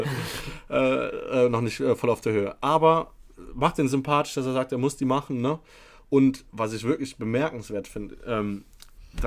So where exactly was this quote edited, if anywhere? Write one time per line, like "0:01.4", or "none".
none